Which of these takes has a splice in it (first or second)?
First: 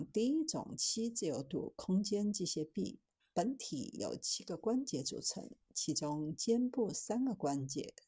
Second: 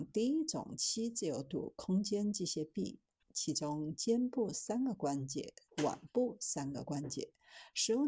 second